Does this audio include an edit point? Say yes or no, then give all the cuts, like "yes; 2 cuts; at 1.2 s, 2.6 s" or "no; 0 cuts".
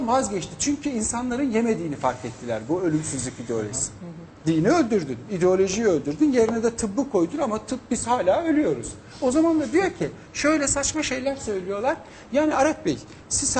yes; 1 cut; at 4.4 s